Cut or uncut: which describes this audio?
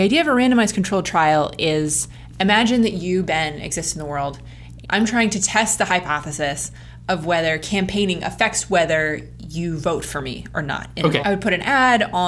cut